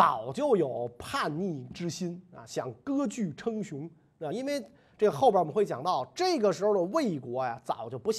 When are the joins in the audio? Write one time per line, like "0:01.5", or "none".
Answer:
none